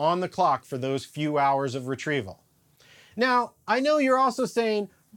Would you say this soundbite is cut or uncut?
uncut